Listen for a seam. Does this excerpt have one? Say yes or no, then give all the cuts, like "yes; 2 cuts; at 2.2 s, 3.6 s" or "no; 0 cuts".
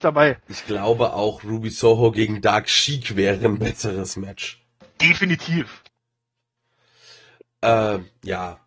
no; 0 cuts